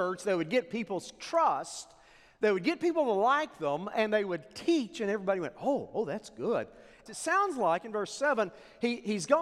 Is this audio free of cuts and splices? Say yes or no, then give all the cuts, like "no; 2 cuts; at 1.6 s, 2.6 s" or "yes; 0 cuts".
no; 1 cut; at 7.1 s